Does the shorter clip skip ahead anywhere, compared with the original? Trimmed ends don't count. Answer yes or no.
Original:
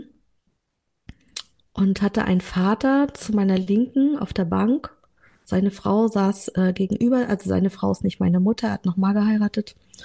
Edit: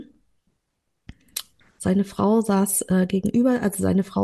yes